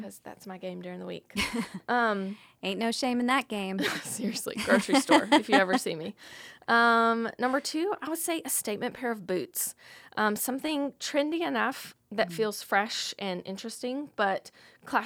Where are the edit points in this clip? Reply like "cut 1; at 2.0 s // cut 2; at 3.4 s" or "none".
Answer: none